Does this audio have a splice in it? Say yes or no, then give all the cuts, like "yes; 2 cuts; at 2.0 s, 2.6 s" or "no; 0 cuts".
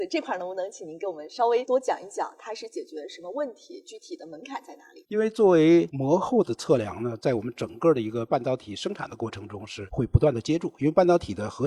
no; 0 cuts